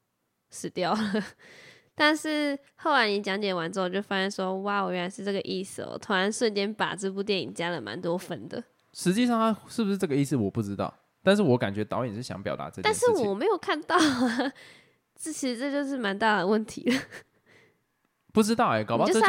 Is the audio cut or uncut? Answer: uncut